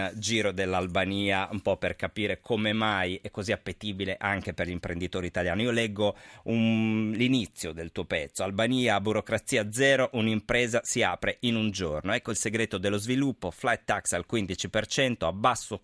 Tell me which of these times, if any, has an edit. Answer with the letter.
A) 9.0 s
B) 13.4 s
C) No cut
C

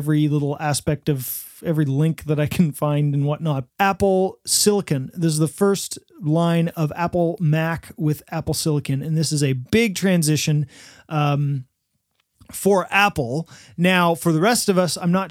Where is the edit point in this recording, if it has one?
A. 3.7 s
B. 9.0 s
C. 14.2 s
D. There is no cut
A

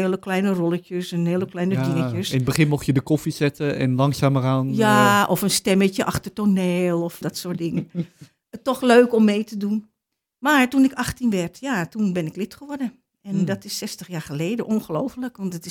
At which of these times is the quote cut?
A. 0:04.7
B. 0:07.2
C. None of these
B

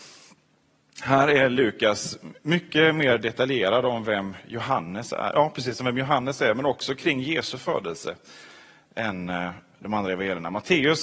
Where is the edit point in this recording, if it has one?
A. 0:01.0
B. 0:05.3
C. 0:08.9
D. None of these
B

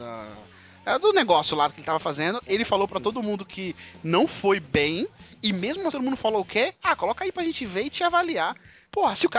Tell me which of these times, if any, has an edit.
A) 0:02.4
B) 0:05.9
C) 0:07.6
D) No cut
B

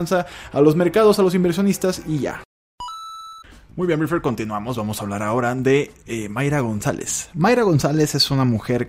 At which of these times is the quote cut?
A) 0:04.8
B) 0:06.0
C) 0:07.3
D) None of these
D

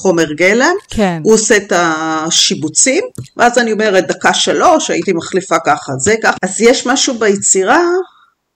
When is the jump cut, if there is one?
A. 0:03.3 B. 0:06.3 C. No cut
B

